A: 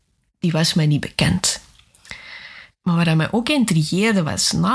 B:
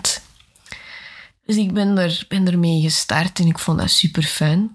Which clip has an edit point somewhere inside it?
A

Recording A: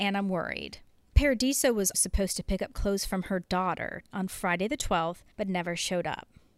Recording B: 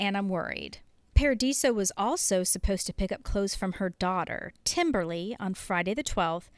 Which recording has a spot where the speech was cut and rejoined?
A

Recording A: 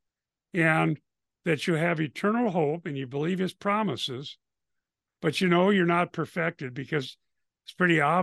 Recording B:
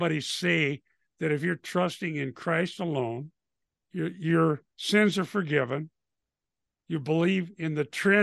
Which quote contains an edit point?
B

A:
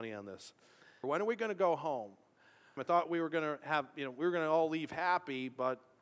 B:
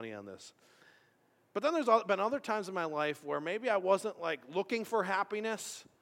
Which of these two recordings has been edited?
A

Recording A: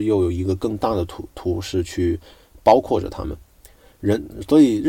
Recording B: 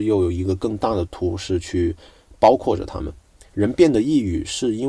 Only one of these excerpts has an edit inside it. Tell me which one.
B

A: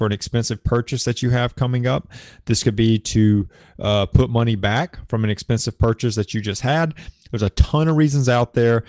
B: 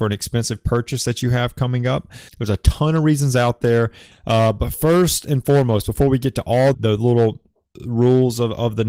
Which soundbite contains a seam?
B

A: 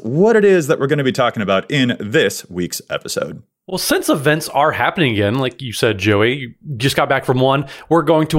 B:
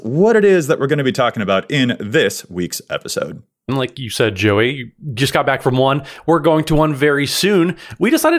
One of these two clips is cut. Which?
B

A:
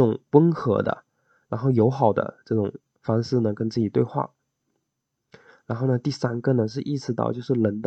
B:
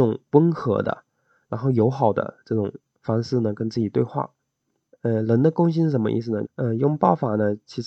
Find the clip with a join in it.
B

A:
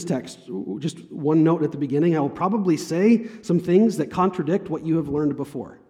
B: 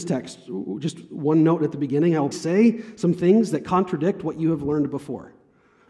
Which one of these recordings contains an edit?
B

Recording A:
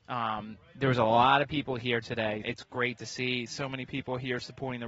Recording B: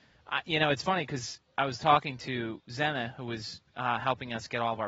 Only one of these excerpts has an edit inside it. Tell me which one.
A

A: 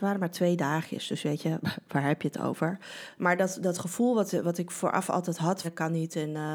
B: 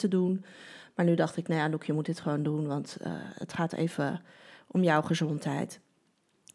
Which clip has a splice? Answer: A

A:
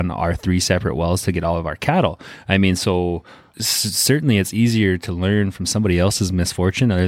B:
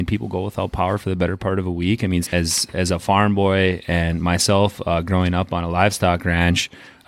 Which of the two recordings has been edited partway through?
B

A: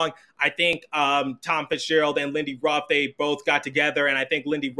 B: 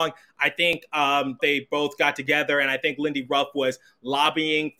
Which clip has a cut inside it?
B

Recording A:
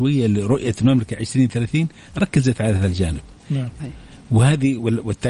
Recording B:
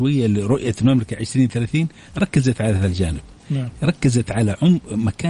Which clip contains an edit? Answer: A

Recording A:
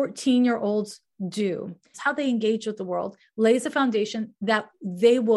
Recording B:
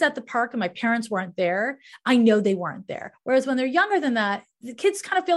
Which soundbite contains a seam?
A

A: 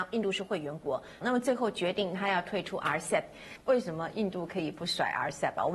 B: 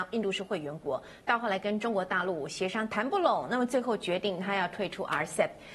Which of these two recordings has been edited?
A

